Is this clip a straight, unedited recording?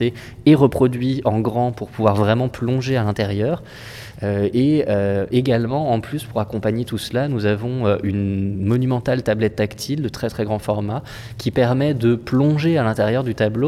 yes; 0 cuts

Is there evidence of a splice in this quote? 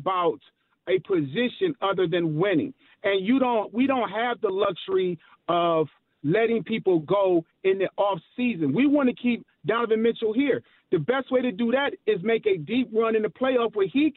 no; 0 cuts

